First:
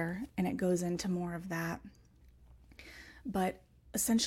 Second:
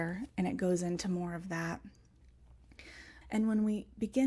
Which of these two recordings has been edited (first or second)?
second